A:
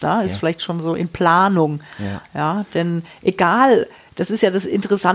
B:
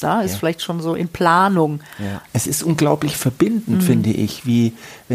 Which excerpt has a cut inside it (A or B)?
B